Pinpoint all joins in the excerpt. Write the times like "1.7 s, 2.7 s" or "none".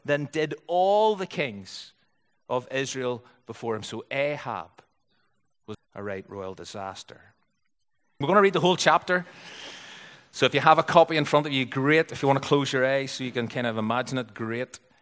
5.7 s, 8.2 s